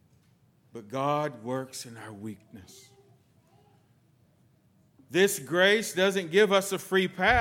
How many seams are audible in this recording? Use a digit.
0